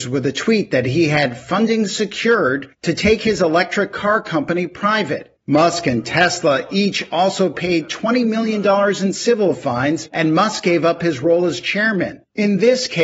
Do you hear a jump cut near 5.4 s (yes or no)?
yes